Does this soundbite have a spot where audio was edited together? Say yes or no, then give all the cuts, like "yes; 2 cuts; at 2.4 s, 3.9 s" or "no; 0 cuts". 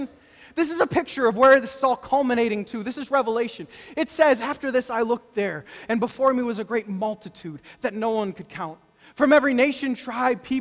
no; 0 cuts